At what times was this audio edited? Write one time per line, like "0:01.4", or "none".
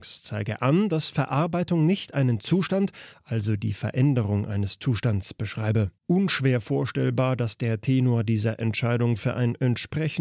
0:03.1
0:06.0